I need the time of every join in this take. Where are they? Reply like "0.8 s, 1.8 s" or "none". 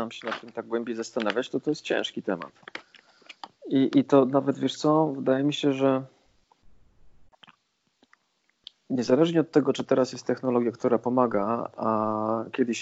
11.8 s